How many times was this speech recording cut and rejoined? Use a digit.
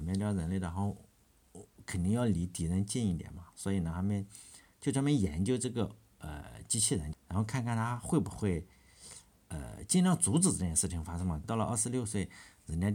2